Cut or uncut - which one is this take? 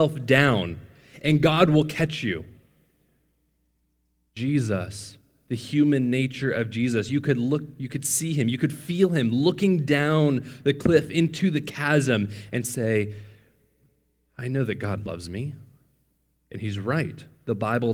uncut